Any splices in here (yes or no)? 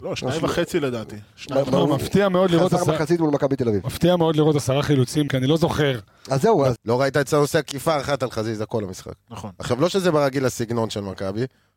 yes